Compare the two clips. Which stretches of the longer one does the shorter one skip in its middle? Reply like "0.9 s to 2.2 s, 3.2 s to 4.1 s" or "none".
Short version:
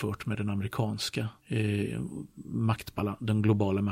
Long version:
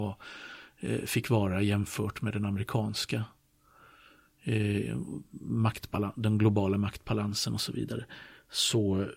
3.3 s to 4.3 s